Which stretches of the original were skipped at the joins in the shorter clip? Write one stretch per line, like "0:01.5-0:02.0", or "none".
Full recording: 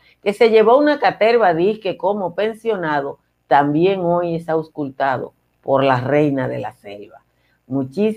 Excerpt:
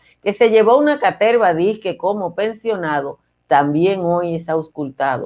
none